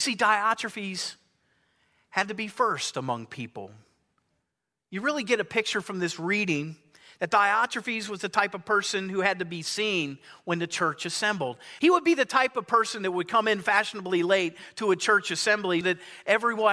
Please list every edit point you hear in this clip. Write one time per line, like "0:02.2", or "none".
0:11.8
0:15.8